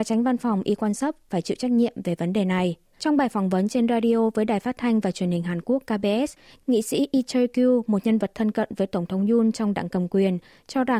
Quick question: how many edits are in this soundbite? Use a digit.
1